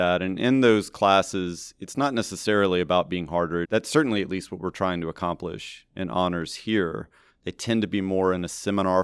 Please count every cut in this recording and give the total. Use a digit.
2